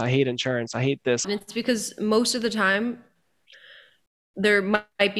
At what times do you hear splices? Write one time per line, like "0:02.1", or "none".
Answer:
0:01.2